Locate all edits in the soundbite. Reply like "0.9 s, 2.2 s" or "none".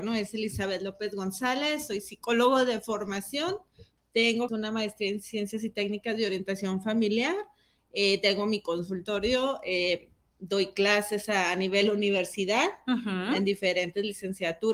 4.5 s